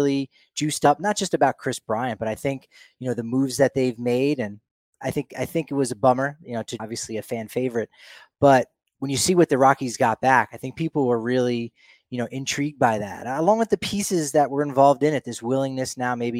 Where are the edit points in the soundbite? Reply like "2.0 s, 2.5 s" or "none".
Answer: 6.8 s